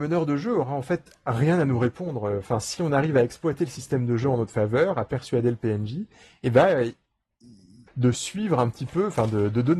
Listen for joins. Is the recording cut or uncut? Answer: cut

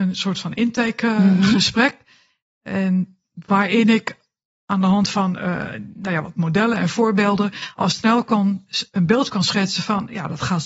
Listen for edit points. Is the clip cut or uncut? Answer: uncut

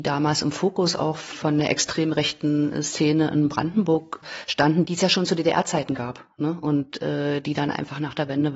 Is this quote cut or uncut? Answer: uncut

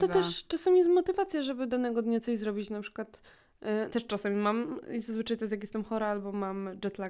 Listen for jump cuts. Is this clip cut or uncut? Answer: cut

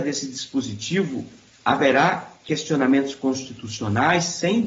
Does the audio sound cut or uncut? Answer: uncut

